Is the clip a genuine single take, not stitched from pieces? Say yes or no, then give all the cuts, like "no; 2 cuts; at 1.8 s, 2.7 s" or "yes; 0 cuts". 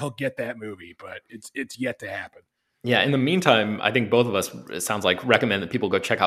yes; 0 cuts